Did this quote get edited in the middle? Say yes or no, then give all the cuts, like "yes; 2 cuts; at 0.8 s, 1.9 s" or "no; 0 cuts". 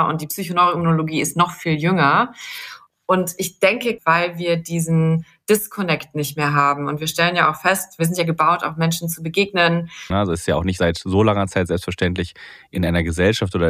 yes; 2 cuts; at 4.0 s, 10.1 s